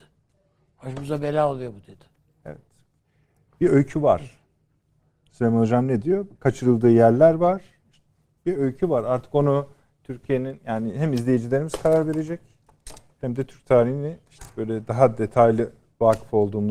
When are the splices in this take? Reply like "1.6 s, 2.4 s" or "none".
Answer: none